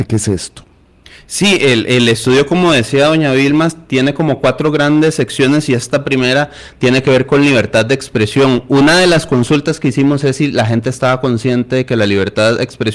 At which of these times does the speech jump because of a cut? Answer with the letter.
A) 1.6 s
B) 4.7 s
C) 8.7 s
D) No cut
D